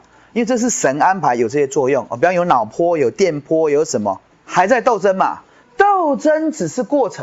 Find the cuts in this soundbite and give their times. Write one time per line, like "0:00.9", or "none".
0:04.3
0:05.6